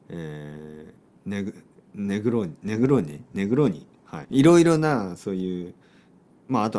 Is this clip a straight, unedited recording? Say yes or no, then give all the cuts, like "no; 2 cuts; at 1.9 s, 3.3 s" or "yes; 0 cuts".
no; 1 cut; at 4.2 s